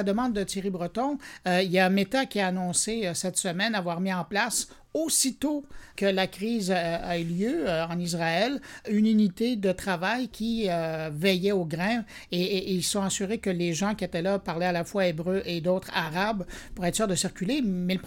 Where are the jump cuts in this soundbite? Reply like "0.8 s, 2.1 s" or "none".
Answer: none